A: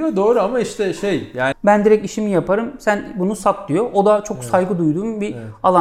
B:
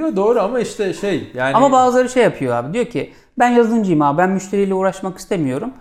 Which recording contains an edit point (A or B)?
A